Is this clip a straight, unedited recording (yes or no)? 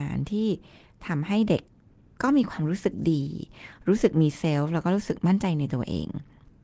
yes